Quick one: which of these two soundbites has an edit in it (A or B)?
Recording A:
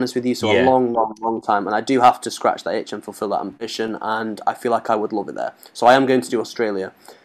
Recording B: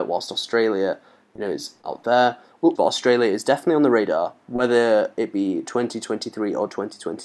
B